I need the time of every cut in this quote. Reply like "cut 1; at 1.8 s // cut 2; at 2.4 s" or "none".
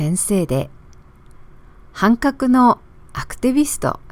none